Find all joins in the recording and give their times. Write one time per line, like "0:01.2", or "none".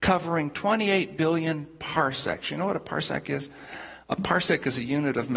none